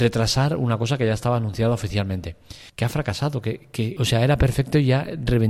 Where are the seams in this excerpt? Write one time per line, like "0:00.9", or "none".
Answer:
0:02.7
0:04.0